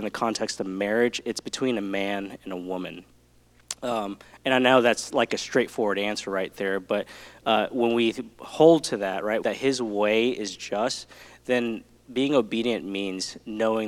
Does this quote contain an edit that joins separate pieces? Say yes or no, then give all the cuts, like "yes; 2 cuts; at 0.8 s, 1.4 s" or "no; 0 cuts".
yes; 1 cut; at 9.4 s